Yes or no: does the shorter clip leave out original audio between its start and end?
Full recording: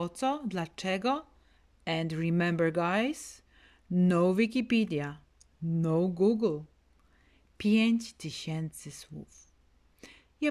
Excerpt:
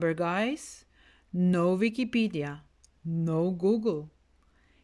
no